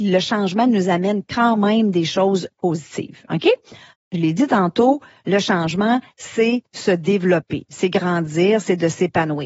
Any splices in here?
yes; 1 cut; at 3.9 s

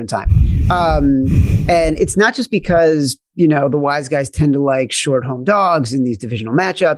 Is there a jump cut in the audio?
no; 0 cuts

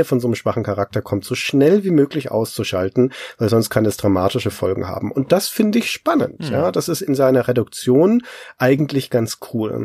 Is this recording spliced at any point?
no; 0 cuts

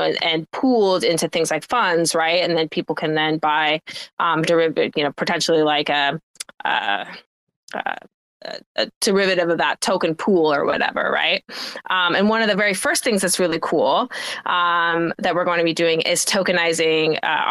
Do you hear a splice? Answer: no; 0 cuts

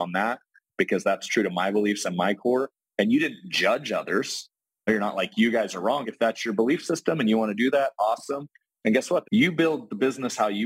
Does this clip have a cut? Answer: yes; 2 cuts; at 6.0 s, 9.2 s

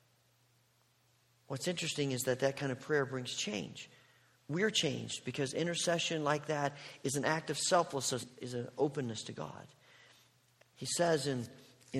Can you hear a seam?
yes; 2 cuts; at 8.2 s, 10.6 s

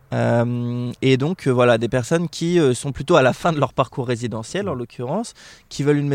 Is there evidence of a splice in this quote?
no; 0 cuts

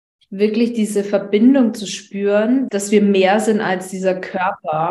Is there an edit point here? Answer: yes; 1 cut; at 2.7 s

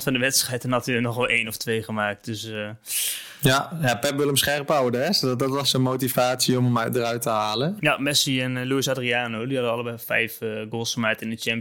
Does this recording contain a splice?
yes; 2 cuts; at 5.6 s, 7.8 s

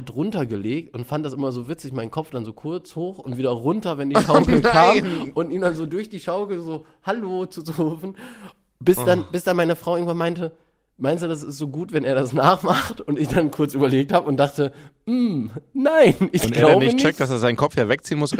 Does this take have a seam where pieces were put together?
no; 0 cuts

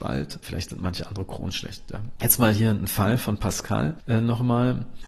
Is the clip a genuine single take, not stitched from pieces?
yes; 0 cuts

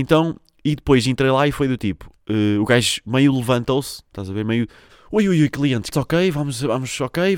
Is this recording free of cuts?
no; 2 cuts; at 4.9 s, 5.9 s

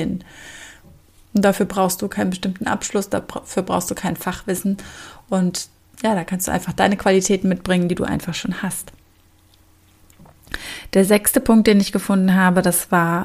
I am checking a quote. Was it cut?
yes; 1 cut; at 1.3 s

